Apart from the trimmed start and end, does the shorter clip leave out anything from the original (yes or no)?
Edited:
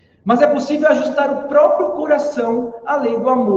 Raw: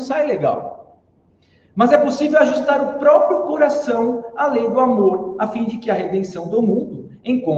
no